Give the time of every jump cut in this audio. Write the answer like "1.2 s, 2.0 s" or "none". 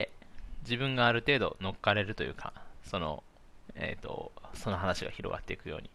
3.7 s